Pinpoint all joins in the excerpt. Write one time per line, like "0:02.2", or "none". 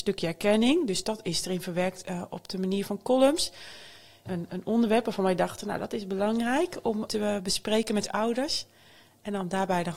0:04.3
0:07.1